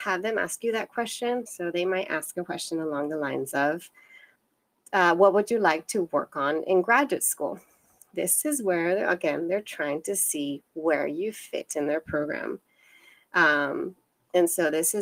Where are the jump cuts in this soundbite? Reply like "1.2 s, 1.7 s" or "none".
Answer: 1.5 s

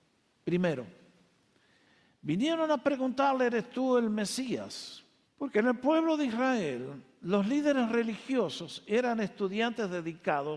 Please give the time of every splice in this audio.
5.3 s

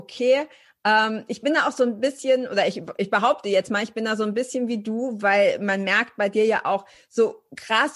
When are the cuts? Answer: none

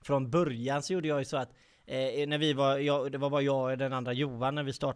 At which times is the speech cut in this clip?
none

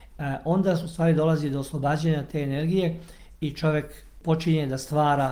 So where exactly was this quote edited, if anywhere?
none

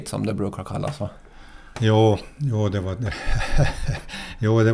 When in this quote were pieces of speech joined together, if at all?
none

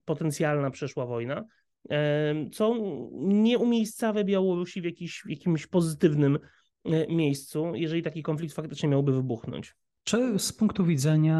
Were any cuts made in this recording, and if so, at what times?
none

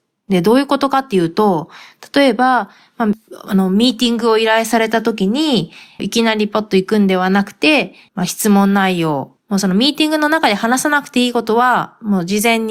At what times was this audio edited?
6.0 s, 8.1 s, 9.4 s

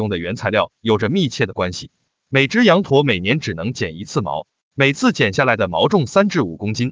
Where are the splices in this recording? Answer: 2.2 s

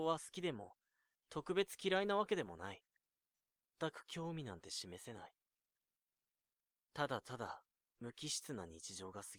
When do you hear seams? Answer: 3.7 s

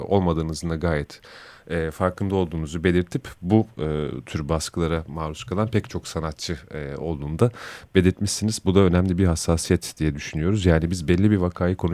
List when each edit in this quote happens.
none

